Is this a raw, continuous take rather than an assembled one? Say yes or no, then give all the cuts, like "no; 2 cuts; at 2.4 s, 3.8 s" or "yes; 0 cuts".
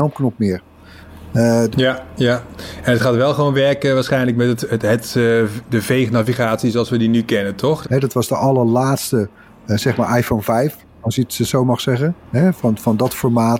no; 2 cuts; at 1.7 s, 7.8 s